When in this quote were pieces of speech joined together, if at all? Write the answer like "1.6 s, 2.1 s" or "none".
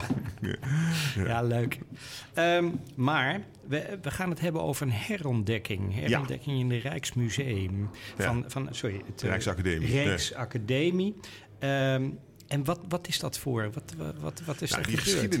8.7 s